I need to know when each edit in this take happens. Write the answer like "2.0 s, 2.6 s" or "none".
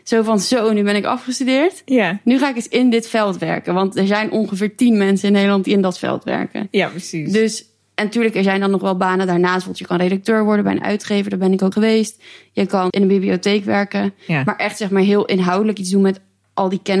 11.7 s, 12.9 s